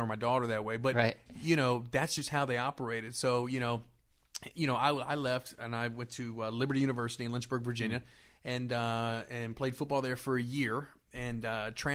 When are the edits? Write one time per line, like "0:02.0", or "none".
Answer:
none